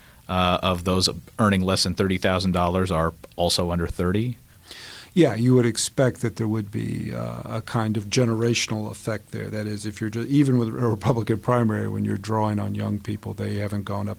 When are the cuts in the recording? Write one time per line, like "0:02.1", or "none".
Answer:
none